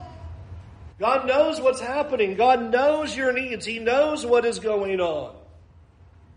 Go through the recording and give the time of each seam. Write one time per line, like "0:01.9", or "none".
0:00.9